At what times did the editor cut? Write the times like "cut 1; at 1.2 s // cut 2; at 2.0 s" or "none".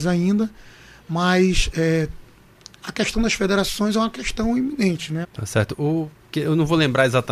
cut 1; at 5.2 s